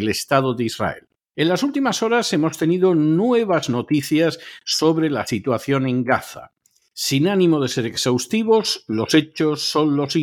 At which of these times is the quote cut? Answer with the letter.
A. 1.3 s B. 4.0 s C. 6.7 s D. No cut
A